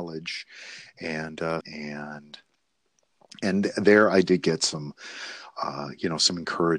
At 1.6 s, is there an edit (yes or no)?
yes